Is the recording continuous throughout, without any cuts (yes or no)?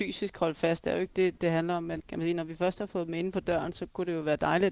no